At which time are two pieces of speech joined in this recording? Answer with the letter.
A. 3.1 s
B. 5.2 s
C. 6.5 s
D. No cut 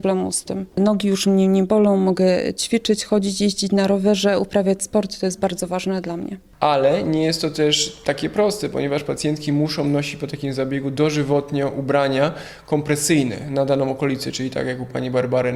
D